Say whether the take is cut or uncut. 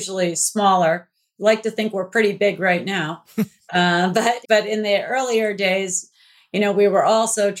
cut